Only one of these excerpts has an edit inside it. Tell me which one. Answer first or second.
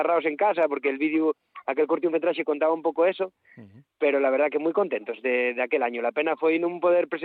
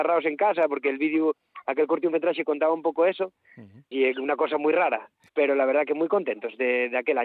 second